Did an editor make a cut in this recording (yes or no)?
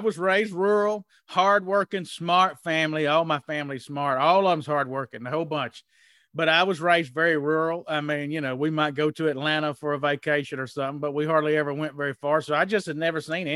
no